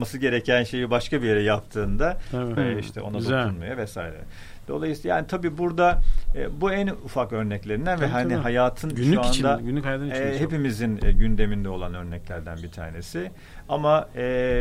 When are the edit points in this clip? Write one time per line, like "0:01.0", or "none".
0:02.6